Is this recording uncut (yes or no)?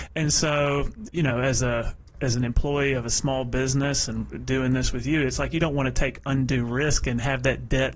no